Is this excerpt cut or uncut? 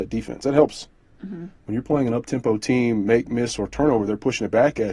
uncut